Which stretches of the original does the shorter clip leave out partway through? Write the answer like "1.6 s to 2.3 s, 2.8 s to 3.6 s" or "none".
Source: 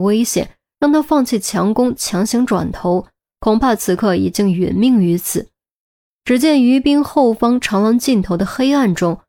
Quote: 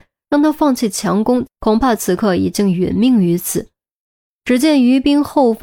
2.0 s to 3.3 s